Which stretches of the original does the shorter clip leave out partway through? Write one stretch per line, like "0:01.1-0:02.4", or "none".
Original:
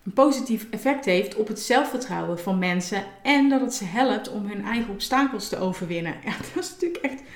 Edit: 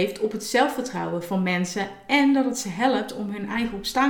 none